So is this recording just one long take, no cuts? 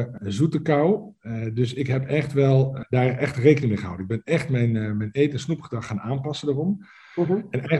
yes; 0 cuts

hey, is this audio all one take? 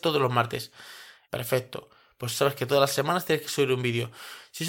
no; 1 cut; at 1.3 s

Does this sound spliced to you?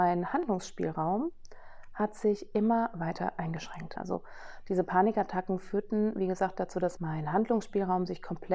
yes; 2 cuts; at 4.0 s, 7.0 s

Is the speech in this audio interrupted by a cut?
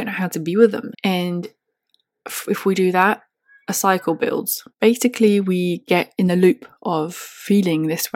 yes; 2 cuts; at 0.9 s, 4.7 s

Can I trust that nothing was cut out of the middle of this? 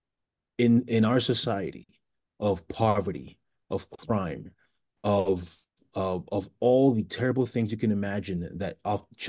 yes; 0 cuts

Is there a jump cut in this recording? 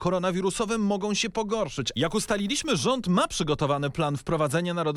yes; 1 cut; at 1.9 s

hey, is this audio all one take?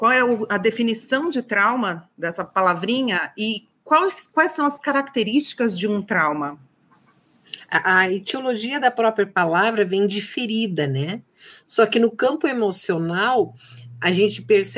yes; 0 cuts

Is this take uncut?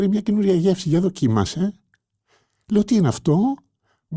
yes; 0 cuts

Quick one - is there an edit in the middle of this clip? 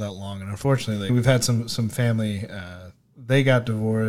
yes; 1 cut; at 1.1 s

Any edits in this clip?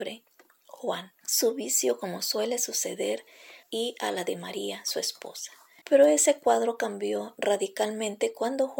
yes; 2 cuts; at 1.2 s, 3.6 s

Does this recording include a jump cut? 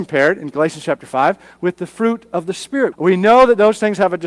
yes; 1 cut; at 2.9 s

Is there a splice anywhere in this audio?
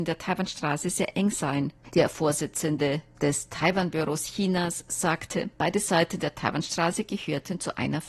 yes; 1 cut; at 1.9 s

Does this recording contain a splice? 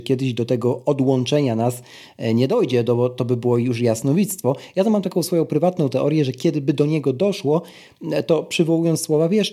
no; 0 cuts

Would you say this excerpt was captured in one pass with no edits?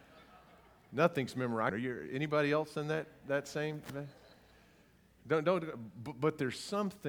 no; 1 cut; at 1.7 s

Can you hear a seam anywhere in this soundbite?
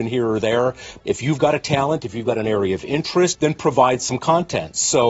yes; 2 cuts; at 1.0 s, 3.3 s

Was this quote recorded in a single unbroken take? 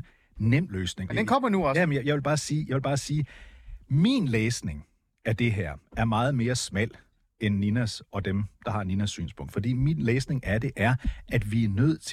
no; 1 cut; at 1.1 s

